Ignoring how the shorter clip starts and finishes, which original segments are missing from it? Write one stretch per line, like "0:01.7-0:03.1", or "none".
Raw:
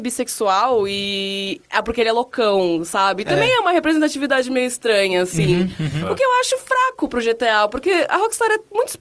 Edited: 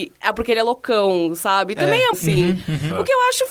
0:03.6-0:05.2